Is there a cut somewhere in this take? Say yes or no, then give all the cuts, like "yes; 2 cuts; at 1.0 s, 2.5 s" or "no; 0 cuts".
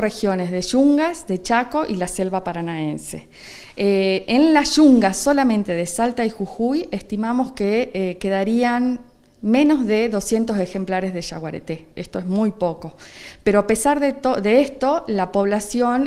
no; 0 cuts